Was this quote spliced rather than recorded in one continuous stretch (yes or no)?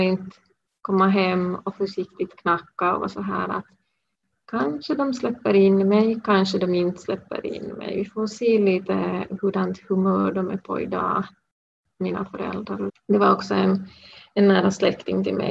yes